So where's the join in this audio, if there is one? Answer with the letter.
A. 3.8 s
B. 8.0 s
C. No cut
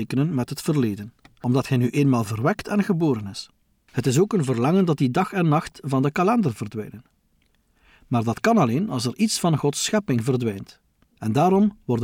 A